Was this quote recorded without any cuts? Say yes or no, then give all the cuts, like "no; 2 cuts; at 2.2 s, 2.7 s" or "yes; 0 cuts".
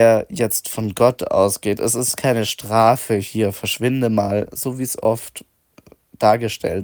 yes; 0 cuts